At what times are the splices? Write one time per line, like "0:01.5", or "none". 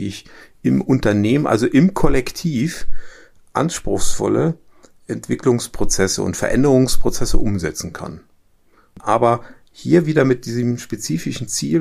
0:09.0